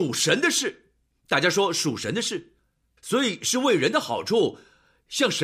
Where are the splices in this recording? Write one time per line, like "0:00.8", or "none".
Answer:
0:03.0